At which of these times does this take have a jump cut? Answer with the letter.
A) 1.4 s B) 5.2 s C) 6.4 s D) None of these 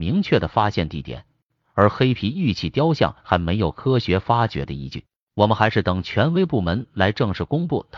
B